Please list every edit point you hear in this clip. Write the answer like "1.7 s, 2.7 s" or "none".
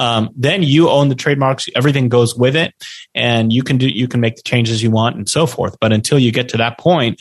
none